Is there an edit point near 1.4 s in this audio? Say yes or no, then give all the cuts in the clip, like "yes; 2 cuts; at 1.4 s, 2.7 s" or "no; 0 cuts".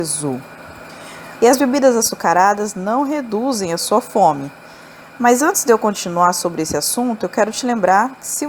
yes; 1 cut; at 1.4 s